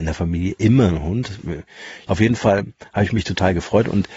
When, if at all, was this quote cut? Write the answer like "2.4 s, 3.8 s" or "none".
2.1 s